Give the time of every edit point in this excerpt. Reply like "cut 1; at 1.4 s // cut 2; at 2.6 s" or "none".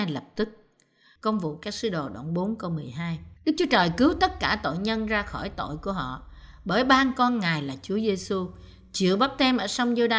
cut 1; at 1.2 s // cut 2; at 3.4 s